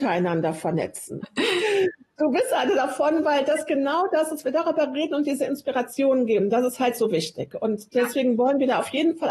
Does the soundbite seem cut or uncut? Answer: cut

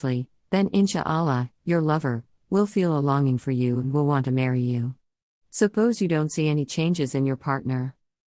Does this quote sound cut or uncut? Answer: uncut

